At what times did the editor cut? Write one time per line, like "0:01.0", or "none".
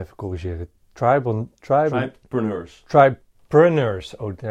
none